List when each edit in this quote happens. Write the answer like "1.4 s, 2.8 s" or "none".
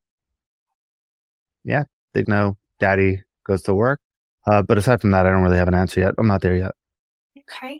2.2 s, 4.4 s